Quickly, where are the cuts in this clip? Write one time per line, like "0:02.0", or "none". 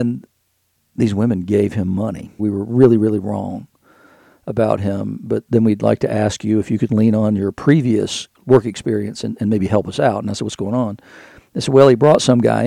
0:02.4